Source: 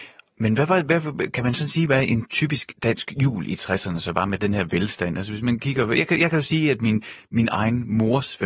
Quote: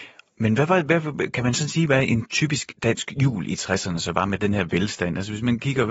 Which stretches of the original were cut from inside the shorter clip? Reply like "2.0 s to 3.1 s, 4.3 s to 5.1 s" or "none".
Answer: none